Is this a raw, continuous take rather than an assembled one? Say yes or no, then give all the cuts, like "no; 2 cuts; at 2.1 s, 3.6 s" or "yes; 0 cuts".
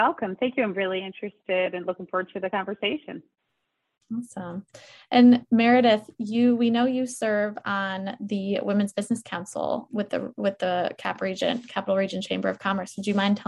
no; 1 cut; at 9.9 s